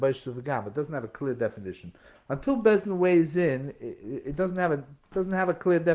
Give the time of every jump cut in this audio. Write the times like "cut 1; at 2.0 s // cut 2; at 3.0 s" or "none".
none